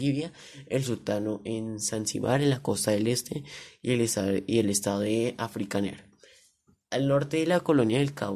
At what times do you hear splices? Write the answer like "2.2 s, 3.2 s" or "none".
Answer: none